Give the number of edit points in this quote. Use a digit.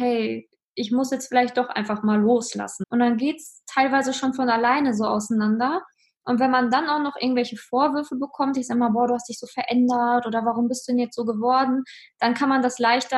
1